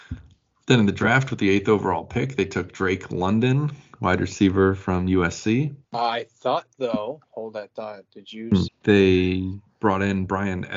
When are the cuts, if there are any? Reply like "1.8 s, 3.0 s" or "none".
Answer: 5.8 s, 8.7 s